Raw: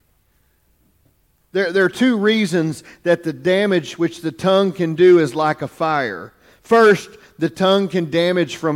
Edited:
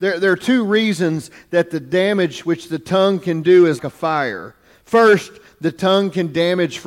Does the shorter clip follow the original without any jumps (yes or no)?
no